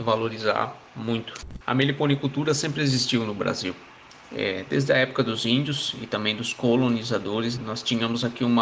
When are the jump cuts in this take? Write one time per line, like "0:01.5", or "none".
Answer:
0:01.6
0:07.6